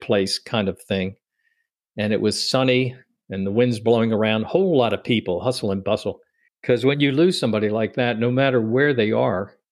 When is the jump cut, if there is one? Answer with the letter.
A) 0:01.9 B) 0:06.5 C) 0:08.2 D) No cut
B